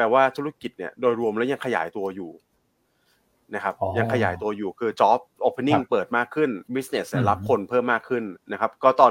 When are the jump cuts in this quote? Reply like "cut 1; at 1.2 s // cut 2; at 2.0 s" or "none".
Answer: cut 1; at 6.7 s